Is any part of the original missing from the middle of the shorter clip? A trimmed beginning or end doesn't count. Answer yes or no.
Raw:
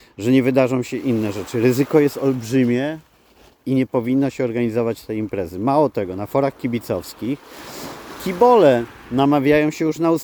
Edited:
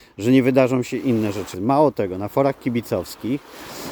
yes